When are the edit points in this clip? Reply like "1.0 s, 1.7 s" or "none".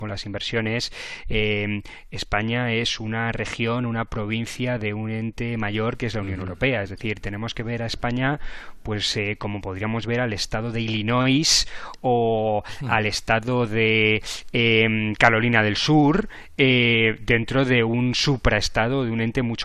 none